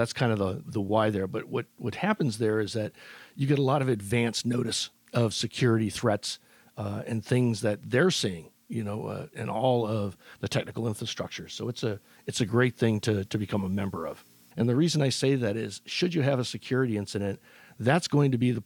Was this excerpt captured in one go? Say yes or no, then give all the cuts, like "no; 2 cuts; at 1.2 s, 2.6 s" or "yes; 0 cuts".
no; 2 cuts; at 9.3 s, 14.5 s